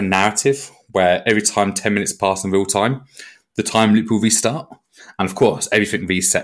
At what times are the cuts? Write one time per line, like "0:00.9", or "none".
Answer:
none